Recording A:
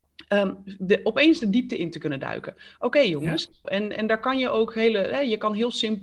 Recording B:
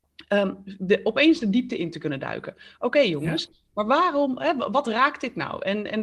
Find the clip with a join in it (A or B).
A